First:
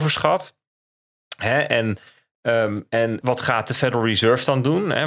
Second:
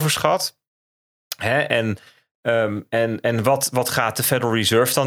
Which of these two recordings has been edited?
first; 1 cut; at 3.2 s

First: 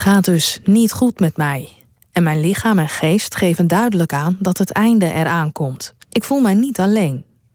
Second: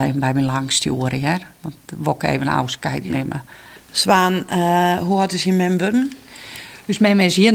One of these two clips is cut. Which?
first; 1 cut; at 6.0 s

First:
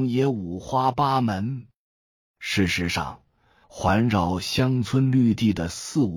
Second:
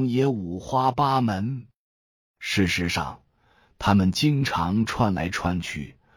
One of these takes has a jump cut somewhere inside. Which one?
first; 1 cut; at 3.6 s

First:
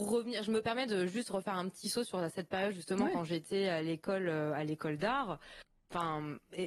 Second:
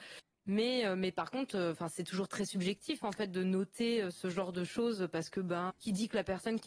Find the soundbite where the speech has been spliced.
second; 1 cut; at 5.7 s

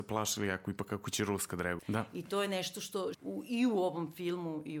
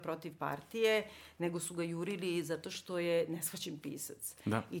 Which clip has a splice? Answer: first; 2 cuts; at 1.8 s, 3.1 s

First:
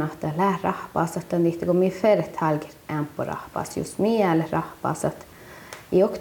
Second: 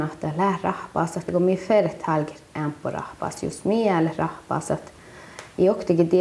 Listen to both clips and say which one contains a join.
second; 1 cut; at 1.3 s

